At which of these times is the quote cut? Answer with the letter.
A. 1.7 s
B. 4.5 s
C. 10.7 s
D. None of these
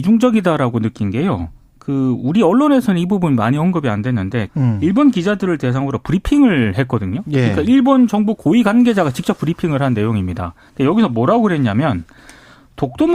B